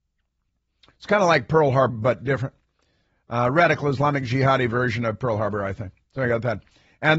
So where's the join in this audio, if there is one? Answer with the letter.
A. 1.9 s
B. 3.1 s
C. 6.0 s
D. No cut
A